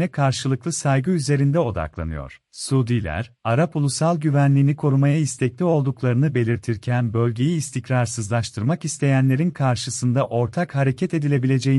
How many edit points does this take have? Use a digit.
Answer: 1